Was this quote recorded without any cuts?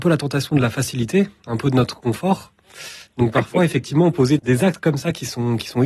no; 2 cuts; at 3.1 s, 4.4 s

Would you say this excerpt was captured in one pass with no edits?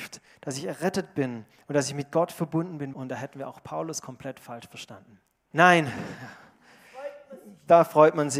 no; 2 cuts; at 2.9 s, 5.5 s

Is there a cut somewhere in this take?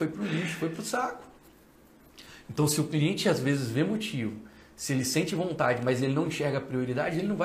no; 0 cuts

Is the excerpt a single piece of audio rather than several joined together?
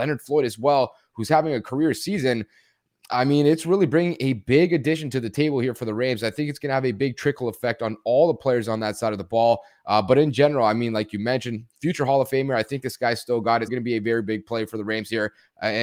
no; 1 cut; at 13.7 s

